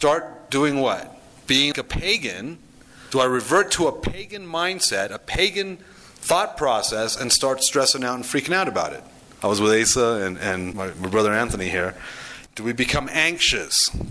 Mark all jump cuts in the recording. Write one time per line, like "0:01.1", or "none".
0:01.7
0:09.4
0:12.5